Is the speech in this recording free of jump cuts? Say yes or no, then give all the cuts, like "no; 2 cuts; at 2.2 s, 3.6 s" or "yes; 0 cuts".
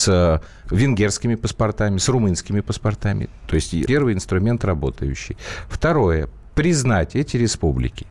no; 1 cut; at 3.9 s